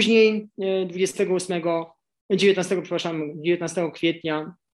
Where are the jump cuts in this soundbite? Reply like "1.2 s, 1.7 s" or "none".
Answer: none